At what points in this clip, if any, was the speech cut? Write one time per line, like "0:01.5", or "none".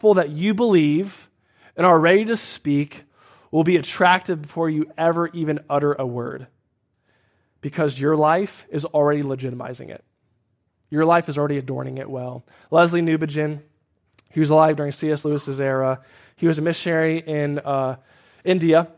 none

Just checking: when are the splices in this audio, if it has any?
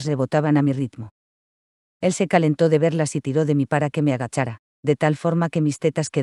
none

